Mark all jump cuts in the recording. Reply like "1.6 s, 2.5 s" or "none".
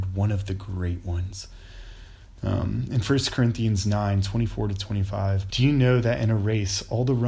5.5 s